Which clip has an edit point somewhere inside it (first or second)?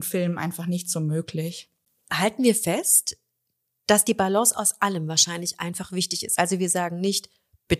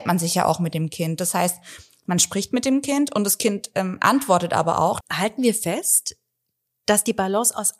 second